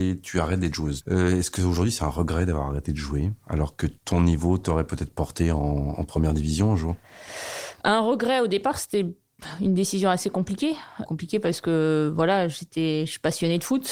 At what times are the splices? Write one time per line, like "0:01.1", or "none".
0:01.0
0:04.0
0:11.1